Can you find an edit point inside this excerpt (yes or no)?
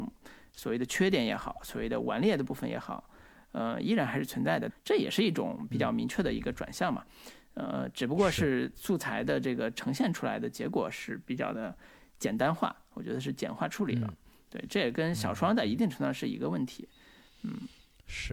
yes